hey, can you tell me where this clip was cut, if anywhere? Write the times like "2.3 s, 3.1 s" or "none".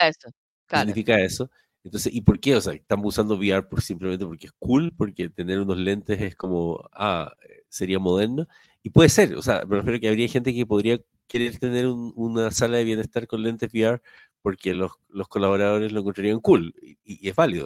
none